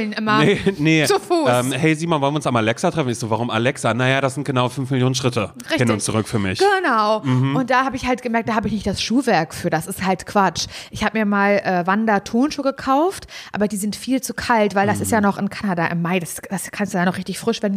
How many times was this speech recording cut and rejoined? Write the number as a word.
zero